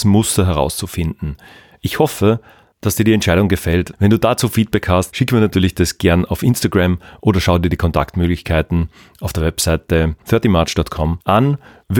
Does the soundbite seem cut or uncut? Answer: cut